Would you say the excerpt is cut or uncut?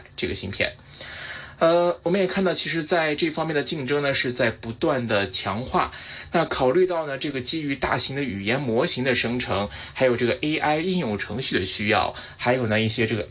uncut